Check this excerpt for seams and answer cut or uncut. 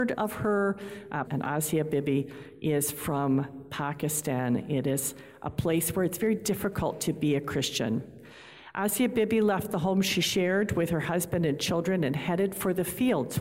cut